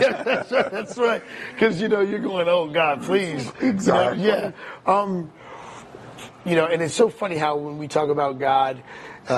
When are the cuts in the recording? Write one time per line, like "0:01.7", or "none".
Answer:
0:06.3